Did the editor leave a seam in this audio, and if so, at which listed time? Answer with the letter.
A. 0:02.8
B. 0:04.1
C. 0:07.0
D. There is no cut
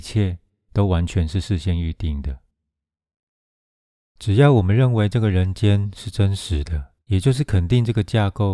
C